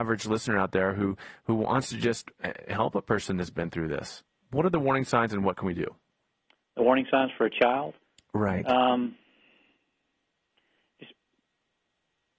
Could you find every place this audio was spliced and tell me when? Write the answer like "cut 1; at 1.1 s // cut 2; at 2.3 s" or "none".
none

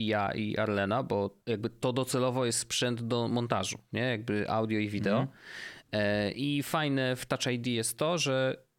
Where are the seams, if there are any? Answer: cut 1; at 1.4 s

